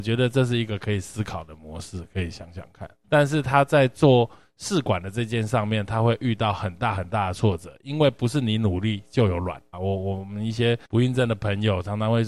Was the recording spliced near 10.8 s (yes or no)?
yes